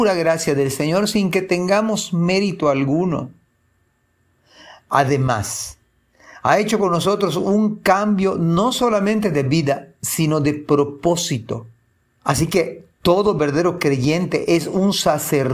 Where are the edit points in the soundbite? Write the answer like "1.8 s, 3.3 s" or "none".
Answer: 12.2 s